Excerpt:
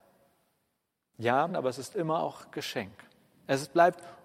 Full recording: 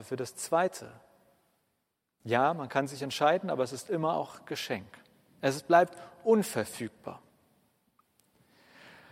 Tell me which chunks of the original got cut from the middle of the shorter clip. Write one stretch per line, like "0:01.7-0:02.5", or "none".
0:02.5-0:03.4